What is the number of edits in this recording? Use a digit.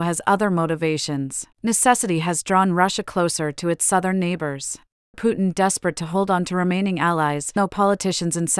3